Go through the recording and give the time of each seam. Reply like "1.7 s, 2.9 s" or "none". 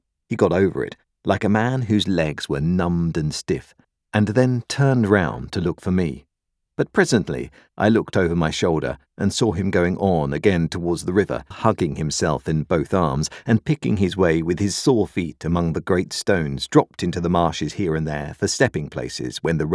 6.7 s, 11.5 s

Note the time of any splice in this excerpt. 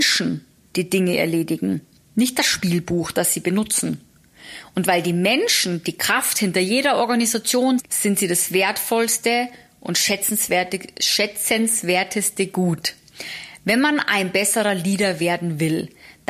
7.8 s, 13.6 s

